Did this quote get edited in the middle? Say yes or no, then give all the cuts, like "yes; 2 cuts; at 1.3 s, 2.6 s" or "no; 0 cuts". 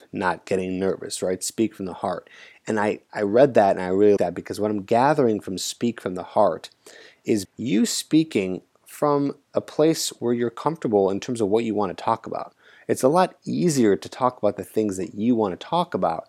yes; 2 cuts; at 4.2 s, 7.4 s